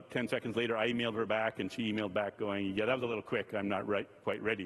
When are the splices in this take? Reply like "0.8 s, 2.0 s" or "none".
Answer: none